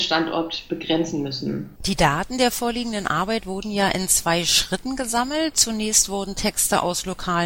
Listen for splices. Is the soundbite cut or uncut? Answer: cut